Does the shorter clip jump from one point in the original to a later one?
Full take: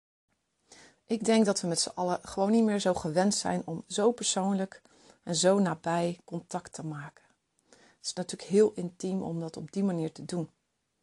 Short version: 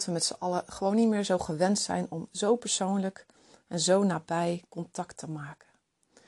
no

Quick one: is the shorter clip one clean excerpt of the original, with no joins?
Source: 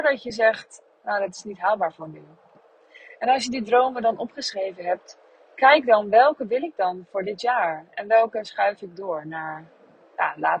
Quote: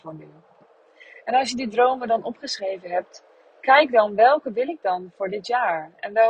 yes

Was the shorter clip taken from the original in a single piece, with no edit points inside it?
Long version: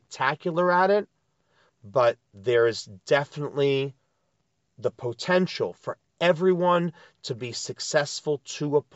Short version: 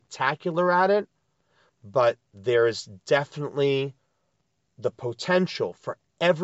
yes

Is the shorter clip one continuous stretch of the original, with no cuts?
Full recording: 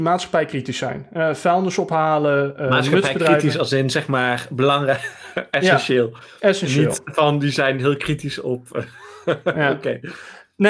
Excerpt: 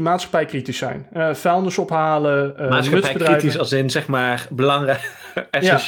yes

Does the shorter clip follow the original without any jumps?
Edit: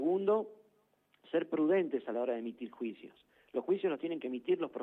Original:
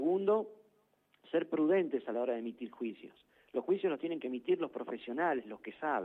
yes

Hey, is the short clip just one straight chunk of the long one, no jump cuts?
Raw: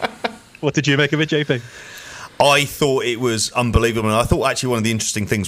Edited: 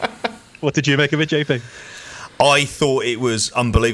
yes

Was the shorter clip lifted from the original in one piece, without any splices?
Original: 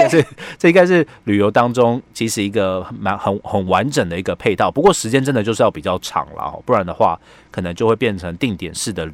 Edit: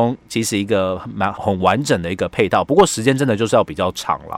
no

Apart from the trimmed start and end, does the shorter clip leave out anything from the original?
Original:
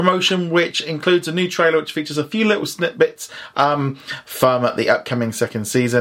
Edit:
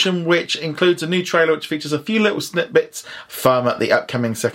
yes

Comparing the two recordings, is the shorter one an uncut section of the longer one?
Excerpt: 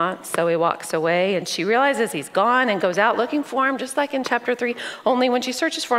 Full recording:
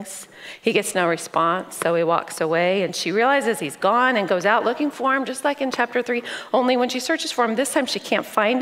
yes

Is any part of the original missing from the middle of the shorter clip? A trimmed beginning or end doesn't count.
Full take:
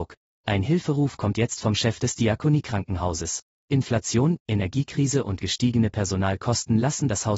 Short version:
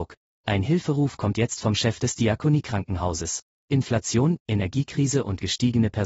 no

